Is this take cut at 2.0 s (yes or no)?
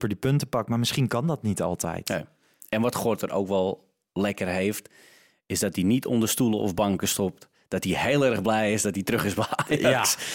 no